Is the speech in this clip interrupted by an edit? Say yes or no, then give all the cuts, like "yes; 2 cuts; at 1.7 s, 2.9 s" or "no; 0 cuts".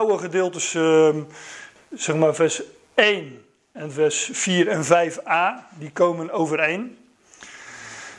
no; 0 cuts